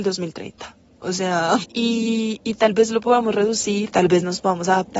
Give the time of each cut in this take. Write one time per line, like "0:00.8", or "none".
0:01.6
0:03.9